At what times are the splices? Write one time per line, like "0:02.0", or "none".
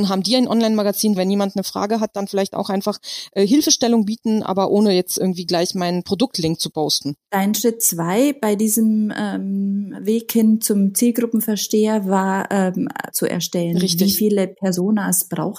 0:01.2
0:07.2
0:13.1